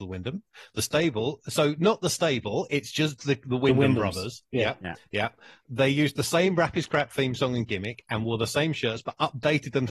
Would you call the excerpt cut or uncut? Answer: uncut